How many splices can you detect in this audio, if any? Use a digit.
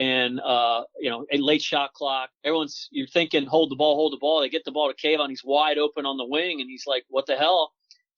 1